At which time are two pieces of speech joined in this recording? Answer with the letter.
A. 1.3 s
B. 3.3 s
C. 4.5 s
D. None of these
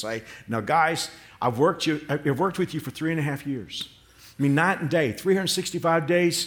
D